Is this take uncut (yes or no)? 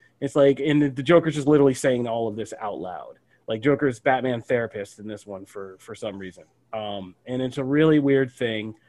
yes